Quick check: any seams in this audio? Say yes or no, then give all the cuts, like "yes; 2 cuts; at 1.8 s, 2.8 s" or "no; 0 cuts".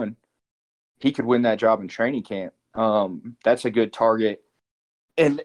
no; 0 cuts